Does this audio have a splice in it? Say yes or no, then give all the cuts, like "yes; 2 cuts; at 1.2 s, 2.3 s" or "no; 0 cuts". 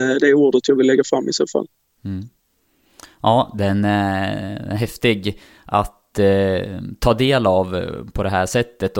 no; 0 cuts